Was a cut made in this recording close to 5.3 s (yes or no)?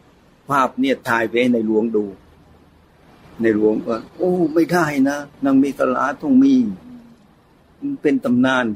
yes